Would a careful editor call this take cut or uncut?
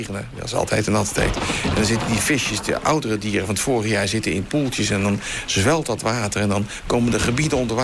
uncut